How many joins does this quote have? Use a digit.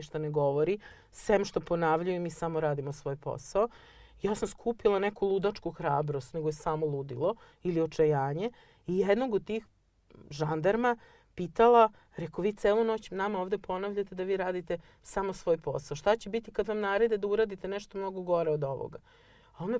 1